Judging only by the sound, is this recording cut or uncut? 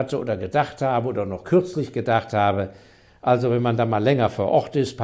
uncut